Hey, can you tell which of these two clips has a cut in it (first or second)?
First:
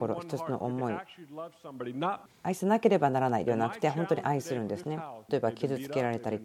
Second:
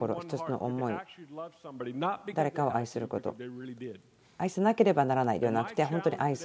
first